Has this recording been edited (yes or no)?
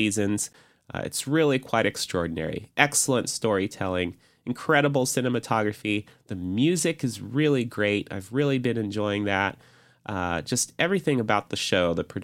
no